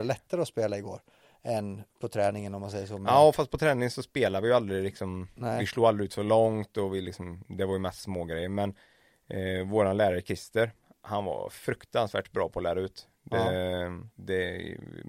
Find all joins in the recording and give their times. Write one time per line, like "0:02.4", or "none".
0:14.1

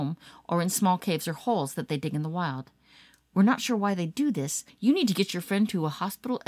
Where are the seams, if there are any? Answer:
0:04.7

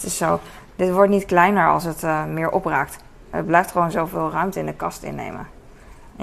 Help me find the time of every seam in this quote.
none

